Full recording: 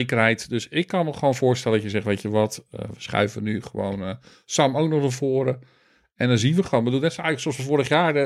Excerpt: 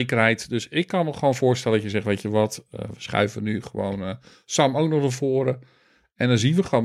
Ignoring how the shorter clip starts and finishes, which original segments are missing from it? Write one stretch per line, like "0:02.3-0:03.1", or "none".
none